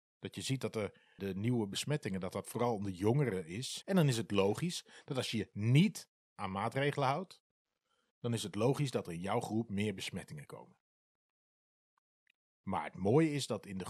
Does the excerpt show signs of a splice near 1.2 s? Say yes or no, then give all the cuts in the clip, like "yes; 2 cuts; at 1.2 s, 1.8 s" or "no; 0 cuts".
yes; 2 cuts; at 1.2 s, 3.8 s